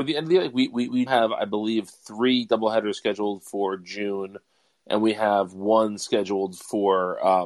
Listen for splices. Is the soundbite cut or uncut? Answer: cut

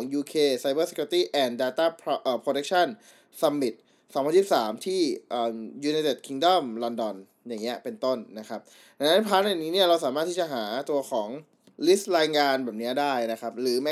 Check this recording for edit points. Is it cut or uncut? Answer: uncut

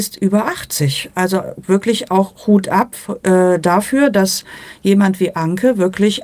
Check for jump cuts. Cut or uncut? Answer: uncut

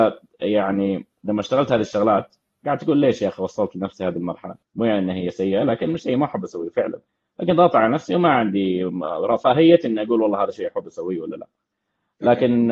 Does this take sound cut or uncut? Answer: cut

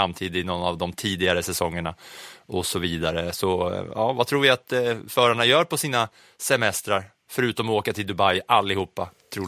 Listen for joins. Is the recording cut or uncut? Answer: uncut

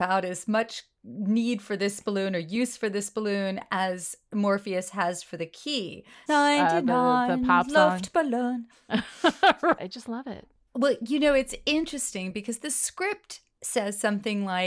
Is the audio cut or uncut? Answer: cut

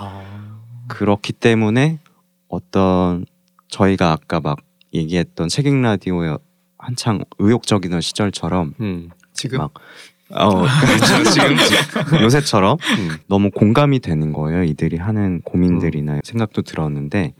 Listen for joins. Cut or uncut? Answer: cut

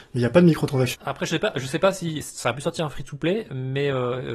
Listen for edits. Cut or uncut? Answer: cut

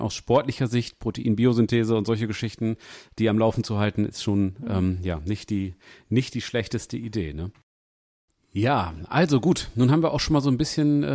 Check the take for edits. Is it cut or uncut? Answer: uncut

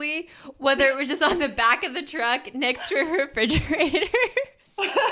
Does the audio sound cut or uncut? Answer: uncut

